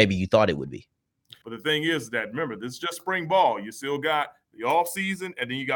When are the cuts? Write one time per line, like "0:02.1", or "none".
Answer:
0:01.4